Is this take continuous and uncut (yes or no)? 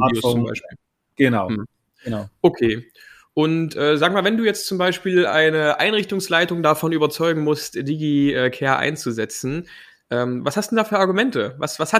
yes